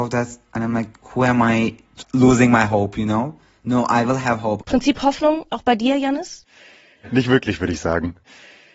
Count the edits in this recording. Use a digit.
1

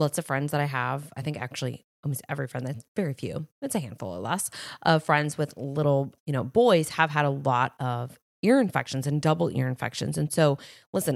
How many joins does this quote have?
1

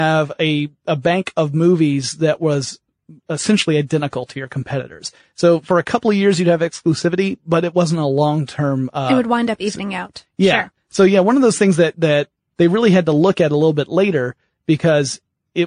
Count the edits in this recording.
1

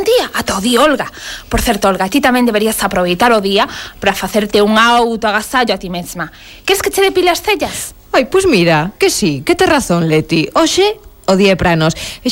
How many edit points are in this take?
0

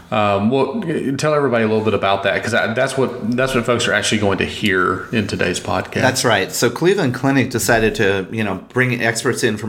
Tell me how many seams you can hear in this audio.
0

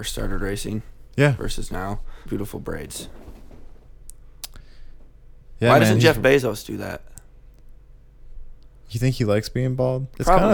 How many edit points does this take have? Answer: 1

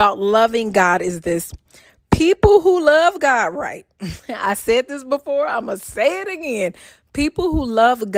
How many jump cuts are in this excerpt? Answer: 0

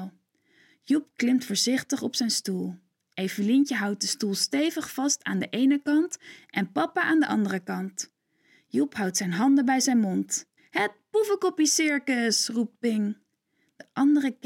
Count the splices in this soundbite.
1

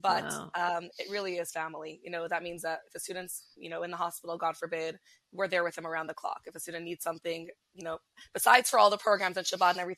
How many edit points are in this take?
1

